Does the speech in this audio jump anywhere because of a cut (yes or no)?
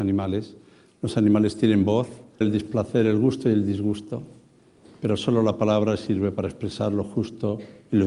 yes